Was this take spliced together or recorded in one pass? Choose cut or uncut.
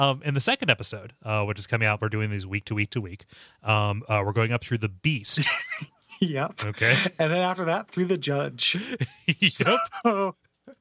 uncut